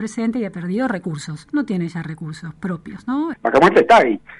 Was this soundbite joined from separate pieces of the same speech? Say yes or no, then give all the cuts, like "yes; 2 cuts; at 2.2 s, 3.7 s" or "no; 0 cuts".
yes; 1 cut; at 3.3 s